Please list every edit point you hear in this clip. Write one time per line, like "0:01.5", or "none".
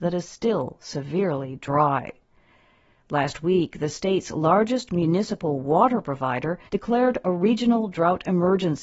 0:03.0
0:06.7